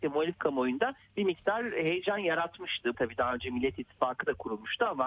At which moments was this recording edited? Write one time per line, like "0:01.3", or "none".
0:02.9